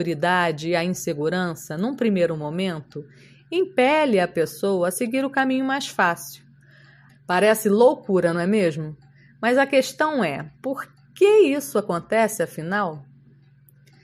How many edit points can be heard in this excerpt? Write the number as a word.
one